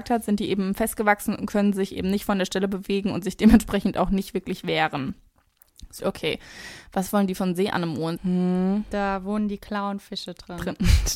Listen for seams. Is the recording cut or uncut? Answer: cut